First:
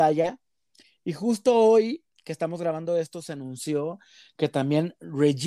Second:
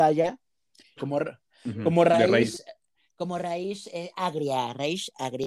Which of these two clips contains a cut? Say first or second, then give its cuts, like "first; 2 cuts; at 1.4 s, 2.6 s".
second; 1 cut; at 1.0 s